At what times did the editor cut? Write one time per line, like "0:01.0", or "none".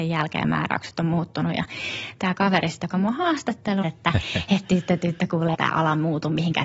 0:03.8
0:05.5

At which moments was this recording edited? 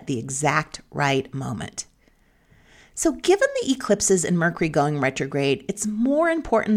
none

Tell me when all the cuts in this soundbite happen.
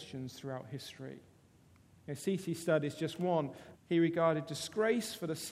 0:03.7

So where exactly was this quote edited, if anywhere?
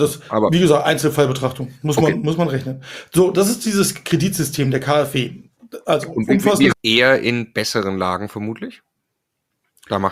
0:06.7

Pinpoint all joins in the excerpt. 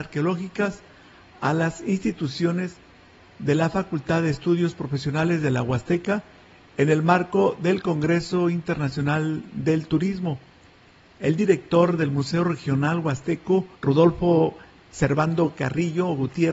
0:13.7

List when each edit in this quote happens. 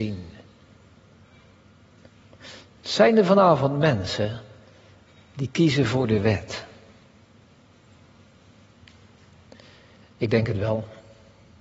none

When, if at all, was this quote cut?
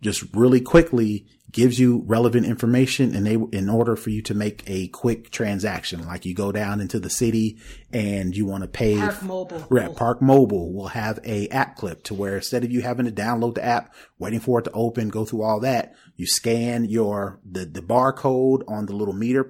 0:06.0
0:09.9

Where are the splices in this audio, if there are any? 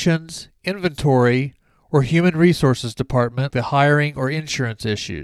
0:03.5

